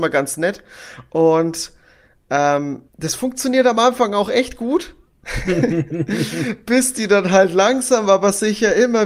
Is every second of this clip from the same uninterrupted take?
no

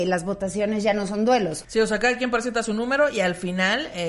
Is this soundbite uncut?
no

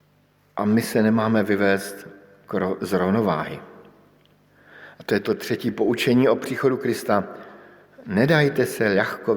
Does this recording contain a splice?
no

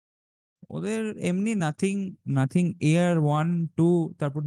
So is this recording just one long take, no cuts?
yes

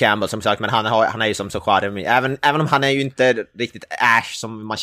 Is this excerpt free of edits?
yes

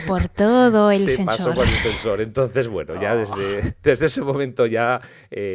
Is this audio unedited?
yes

